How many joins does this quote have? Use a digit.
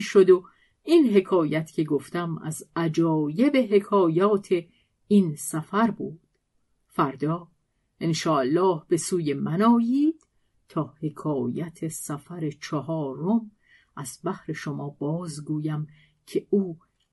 0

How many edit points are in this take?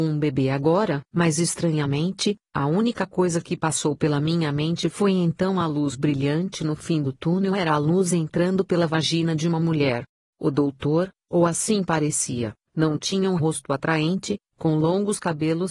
1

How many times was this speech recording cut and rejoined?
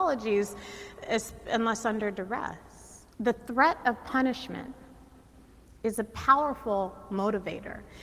1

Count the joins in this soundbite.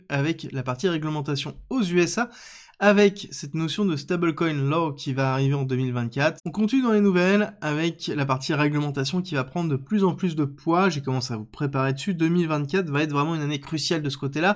1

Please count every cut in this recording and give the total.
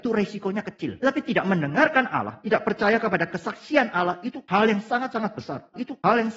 0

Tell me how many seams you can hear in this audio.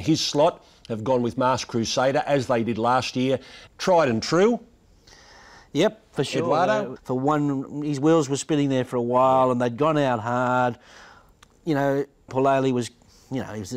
3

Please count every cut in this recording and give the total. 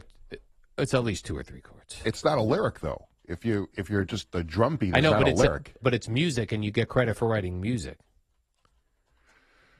1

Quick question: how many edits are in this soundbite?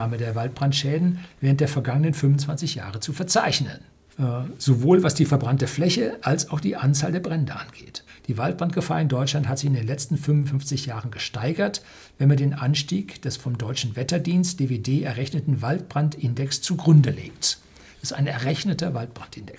2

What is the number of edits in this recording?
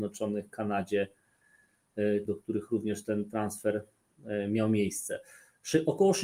1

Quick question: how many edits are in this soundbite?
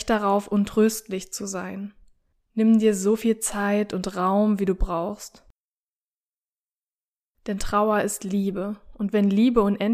1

